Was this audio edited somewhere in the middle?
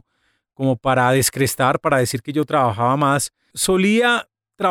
yes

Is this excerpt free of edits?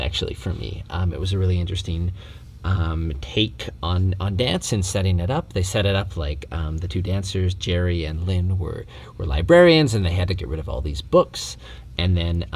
yes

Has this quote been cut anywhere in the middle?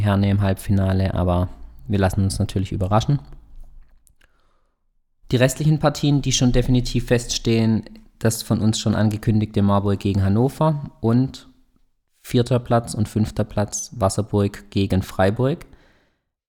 no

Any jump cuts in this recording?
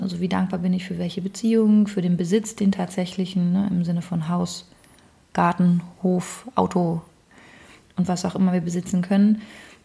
no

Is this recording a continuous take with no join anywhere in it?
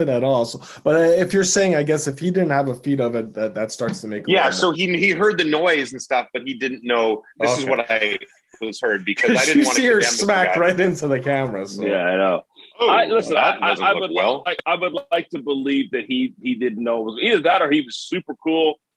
no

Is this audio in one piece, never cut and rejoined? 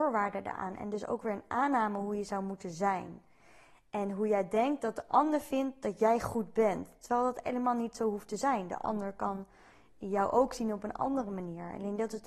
yes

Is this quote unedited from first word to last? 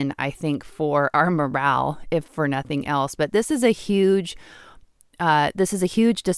yes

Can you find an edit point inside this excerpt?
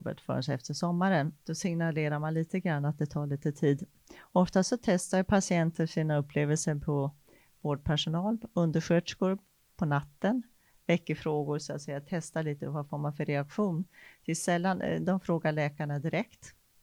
yes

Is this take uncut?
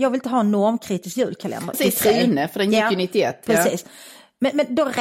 no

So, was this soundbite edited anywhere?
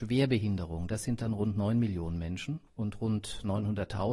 yes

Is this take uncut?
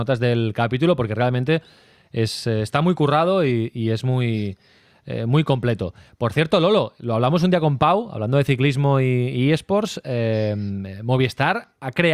yes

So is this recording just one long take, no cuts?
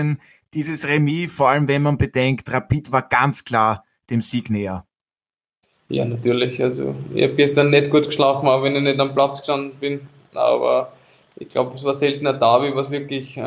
yes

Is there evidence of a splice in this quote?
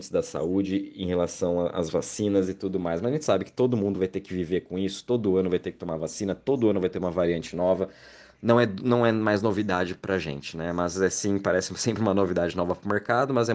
no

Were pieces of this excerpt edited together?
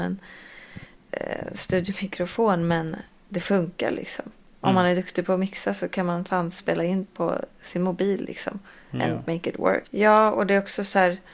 yes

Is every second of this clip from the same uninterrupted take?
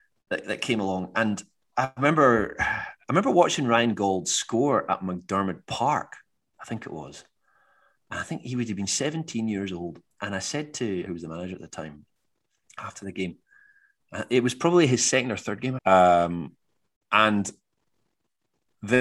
no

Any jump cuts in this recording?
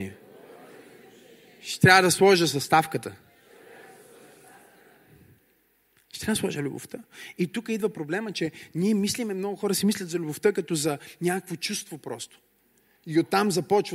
no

